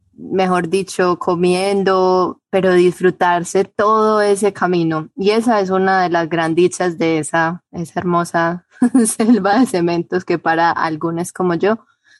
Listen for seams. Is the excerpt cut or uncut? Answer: uncut